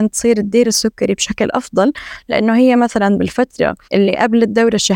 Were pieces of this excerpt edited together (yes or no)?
yes